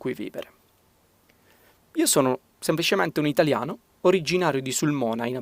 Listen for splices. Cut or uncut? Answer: cut